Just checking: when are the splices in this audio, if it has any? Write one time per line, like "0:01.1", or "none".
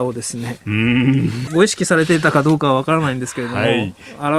0:01.5

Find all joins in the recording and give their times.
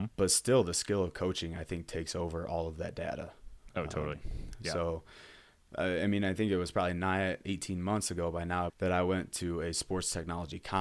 0:07.4
0:08.7

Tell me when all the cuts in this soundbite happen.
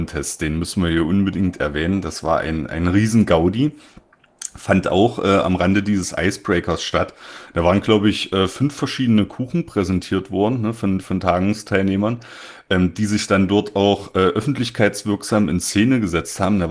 none

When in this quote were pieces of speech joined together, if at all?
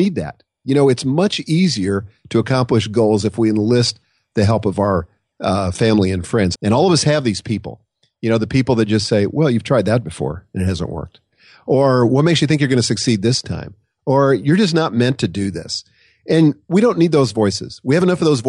0:06.5

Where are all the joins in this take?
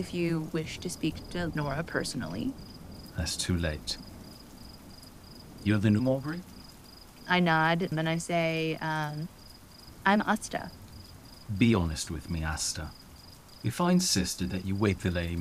0:07.9

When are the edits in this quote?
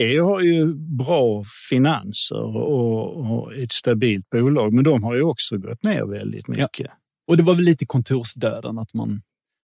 none

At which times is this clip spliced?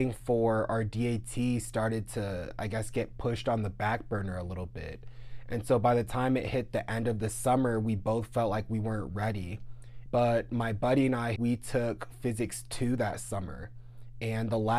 0:10.1
0:11.4

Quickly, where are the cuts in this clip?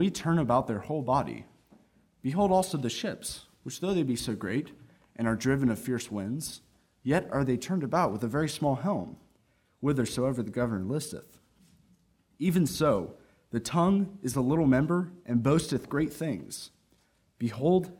none

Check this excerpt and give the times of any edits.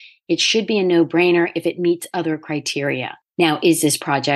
0:03.3

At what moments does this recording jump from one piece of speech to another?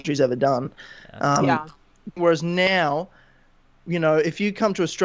0:02.2

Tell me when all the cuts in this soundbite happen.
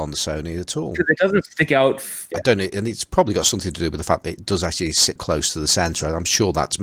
0:02.3
0:05.2

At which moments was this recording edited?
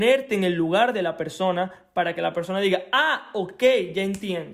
none

